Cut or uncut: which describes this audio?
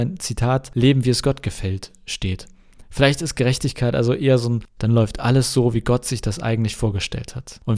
cut